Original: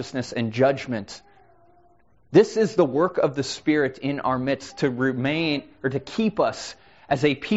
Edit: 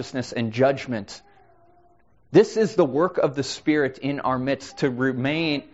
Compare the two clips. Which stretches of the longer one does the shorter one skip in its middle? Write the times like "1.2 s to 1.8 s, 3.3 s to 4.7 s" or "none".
none